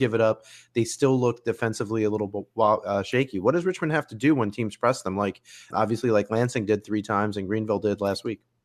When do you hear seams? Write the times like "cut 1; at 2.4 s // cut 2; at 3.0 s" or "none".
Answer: cut 1; at 5.7 s